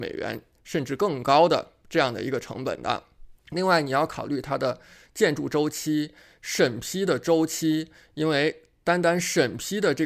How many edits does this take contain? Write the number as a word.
one